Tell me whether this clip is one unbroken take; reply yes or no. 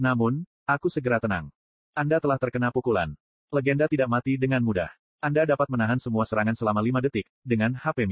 yes